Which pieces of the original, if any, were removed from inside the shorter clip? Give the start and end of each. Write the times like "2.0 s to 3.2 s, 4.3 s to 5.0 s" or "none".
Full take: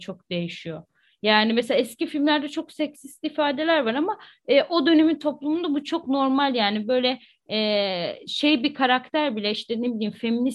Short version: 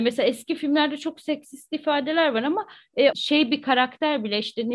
4.6 s to 8.2 s